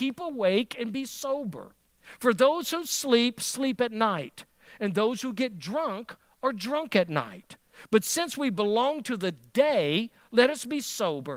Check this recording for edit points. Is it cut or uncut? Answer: uncut